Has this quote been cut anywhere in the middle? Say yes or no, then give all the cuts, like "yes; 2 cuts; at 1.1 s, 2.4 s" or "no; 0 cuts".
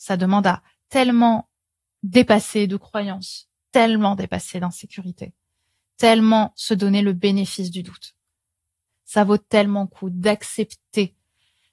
yes; 1 cut; at 8.9 s